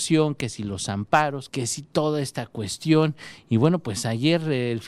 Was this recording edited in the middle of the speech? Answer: yes; 1 cut; at 1.5 s

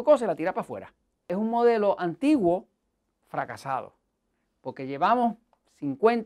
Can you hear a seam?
yes; 1 cut; at 1.2 s

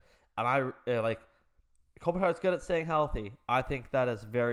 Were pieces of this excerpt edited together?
no; 0 cuts

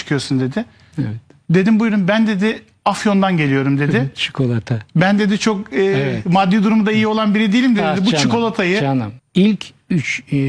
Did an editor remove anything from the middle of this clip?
yes; 1 cut; at 9.2 s

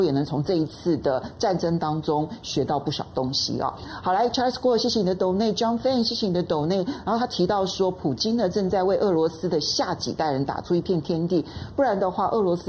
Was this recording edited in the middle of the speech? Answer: no; 0 cuts

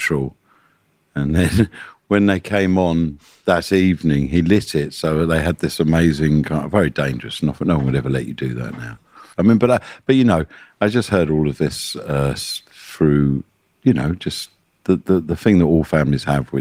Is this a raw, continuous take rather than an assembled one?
no; 1 cut; at 9.3 s

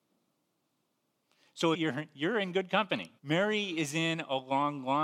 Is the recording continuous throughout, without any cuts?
no; 2 cuts; at 1.7 s, 3.2 s

